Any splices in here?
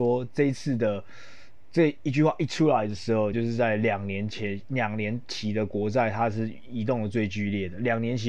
yes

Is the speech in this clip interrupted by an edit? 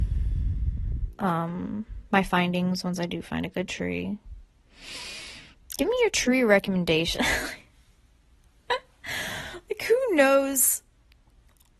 no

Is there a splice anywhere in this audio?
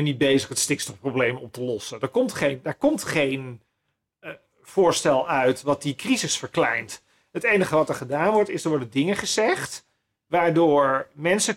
no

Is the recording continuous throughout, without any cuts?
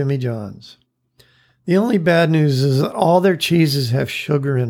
yes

